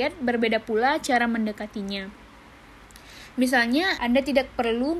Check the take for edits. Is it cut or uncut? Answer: cut